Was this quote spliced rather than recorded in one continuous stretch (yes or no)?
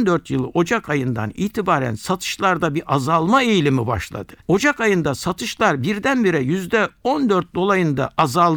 no